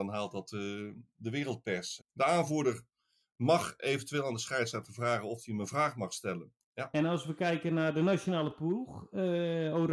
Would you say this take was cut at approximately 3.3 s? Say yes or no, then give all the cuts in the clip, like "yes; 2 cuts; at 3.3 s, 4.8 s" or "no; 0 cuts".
no; 2 cuts; at 2.0 s, 6.6 s